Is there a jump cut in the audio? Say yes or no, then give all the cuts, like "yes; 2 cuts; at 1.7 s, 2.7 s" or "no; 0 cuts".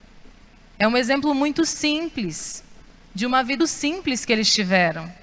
yes; 1 cut; at 3.6 s